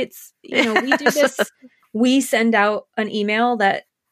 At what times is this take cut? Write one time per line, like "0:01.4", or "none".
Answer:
0:01.8